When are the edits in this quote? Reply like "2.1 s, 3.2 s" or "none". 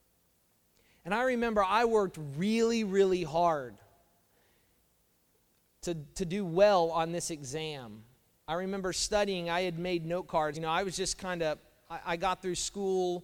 10.5 s